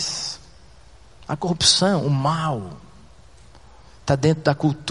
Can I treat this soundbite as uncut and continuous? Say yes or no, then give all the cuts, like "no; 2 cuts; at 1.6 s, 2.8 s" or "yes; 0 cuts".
no; 1 cut; at 1.1 s